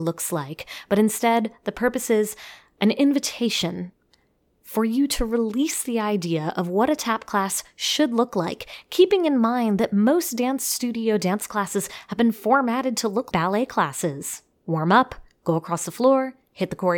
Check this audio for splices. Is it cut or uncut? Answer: cut